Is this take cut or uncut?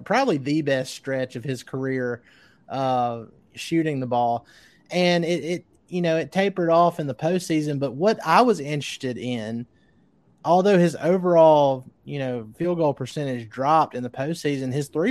uncut